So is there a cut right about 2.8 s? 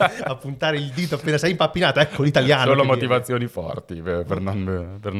no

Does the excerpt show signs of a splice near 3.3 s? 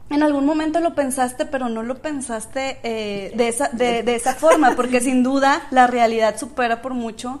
yes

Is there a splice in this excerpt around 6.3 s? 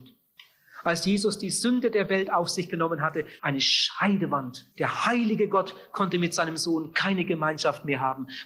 no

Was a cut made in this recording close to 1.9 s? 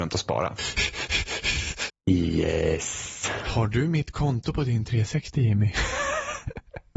yes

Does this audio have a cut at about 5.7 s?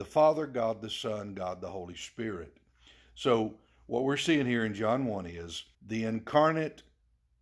yes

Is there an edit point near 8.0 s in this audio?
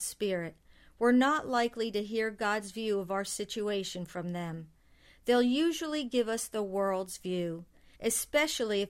yes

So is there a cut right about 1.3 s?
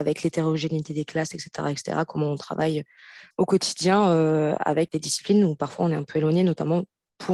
no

